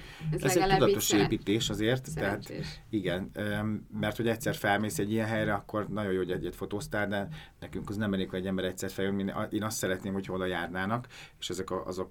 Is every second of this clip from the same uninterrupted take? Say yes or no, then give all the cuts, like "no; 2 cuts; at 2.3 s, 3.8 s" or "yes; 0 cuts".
yes; 0 cuts